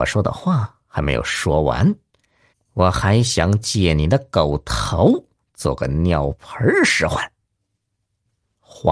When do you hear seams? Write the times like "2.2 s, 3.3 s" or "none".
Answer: 2.5 s